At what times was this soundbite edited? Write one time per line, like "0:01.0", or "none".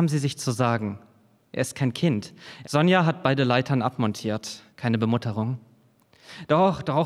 0:02.6
0:04.7

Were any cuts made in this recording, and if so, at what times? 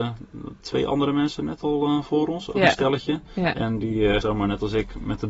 0:04.2

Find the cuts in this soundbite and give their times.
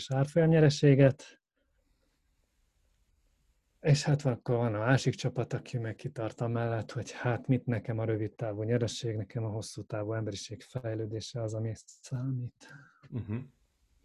none

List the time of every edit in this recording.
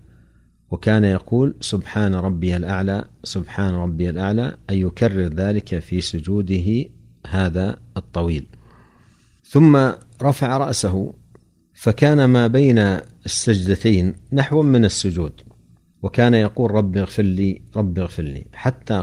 none

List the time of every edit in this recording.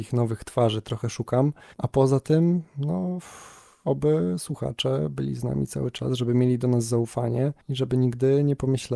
0:07.6

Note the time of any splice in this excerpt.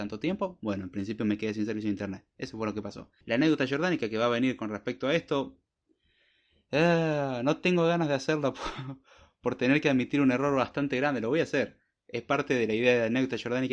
0:03.2

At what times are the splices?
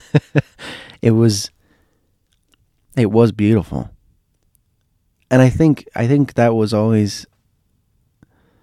none

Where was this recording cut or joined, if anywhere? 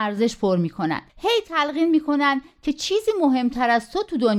0:01.1

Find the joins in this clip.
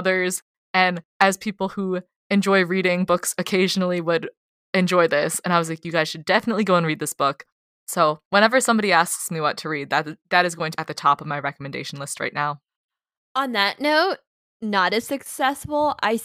0:10.8

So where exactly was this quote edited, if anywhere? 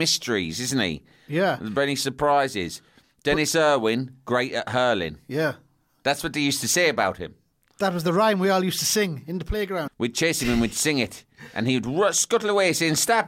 0:09.9

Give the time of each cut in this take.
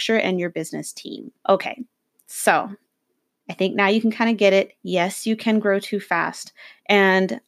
0:01.4

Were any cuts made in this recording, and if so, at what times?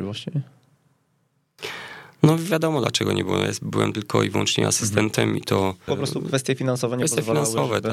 0:05.9

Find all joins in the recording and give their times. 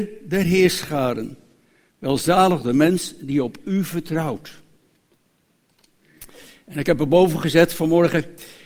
none

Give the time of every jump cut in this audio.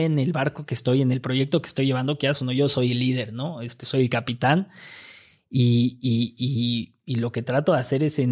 none

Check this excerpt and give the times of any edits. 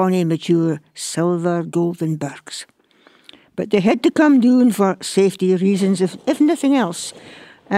none

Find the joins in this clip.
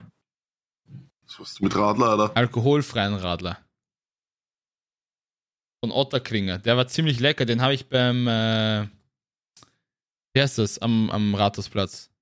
0:11.1

